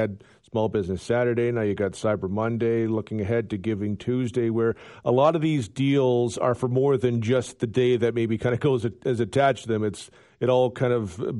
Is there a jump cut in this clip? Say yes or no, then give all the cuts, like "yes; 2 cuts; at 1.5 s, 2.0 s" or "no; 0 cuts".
no; 0 cuts